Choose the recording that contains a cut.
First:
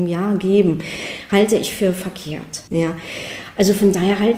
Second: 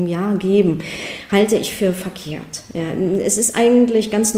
first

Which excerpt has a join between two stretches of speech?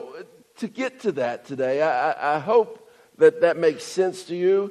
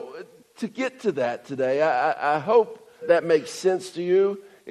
second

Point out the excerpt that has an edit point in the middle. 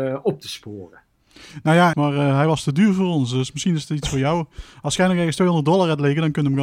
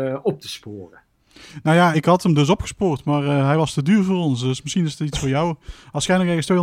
first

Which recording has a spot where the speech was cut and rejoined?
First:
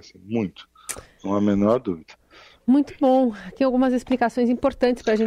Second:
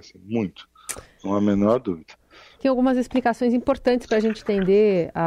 second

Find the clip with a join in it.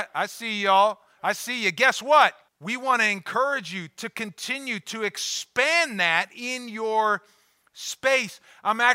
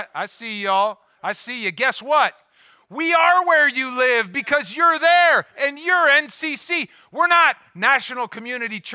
first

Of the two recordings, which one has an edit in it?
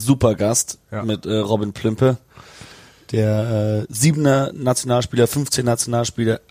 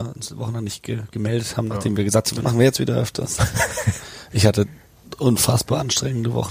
second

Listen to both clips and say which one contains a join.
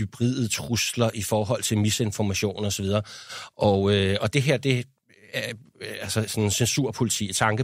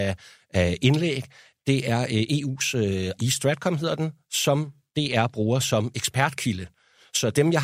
second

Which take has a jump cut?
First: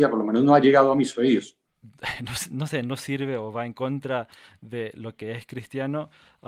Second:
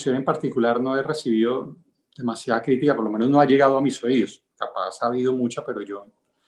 first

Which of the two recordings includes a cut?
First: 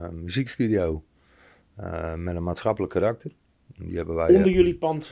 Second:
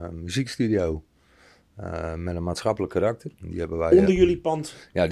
second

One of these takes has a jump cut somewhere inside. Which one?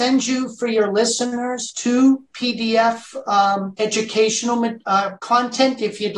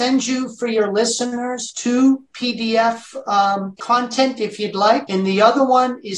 second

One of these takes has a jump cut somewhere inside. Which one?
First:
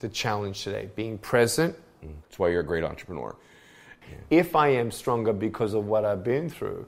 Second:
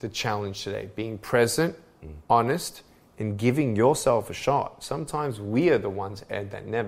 first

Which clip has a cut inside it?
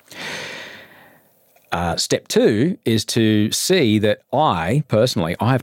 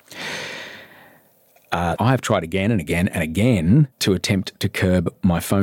second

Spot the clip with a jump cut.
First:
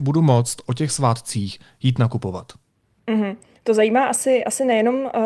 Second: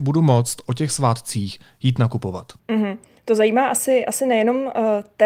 second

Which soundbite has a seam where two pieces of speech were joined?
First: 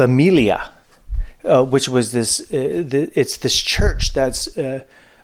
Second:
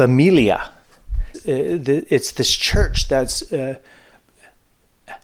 second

